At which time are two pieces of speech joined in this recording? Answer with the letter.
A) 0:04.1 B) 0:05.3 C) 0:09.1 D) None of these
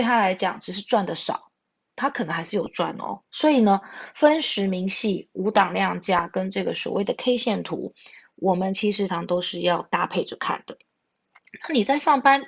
C